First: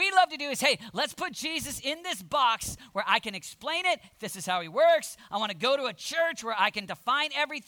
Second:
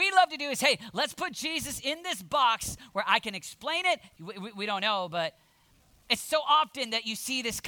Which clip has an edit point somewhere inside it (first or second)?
second